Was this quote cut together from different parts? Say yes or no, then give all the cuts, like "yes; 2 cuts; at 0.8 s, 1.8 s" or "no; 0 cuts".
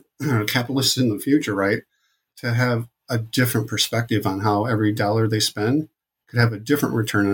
no; 0 cuts